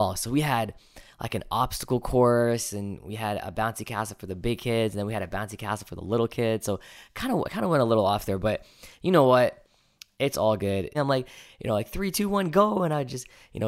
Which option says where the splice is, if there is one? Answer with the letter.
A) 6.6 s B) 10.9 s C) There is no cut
B